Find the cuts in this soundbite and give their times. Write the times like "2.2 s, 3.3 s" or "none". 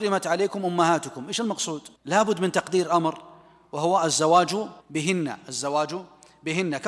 2.0 s, 4.8 s